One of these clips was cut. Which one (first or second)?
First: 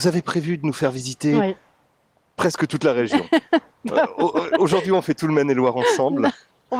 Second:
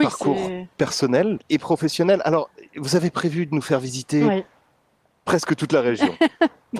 second